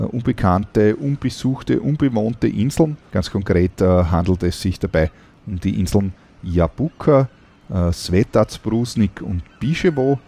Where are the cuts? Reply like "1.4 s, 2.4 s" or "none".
3.1 s